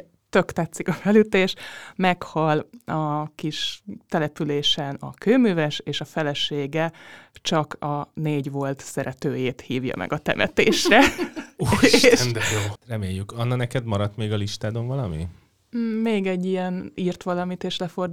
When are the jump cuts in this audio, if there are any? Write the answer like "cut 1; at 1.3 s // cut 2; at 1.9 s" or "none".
cut 1; at 12.8 s